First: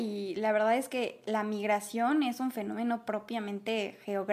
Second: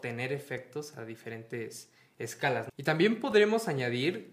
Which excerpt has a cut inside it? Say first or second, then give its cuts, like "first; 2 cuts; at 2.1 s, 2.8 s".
second; 1 cut; at 2.7 s